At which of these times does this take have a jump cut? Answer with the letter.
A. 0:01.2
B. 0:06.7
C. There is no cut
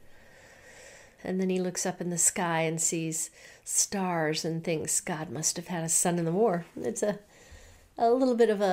A